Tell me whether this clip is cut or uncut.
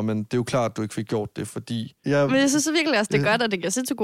cut